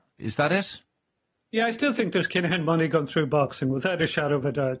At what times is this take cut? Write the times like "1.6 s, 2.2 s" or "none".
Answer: none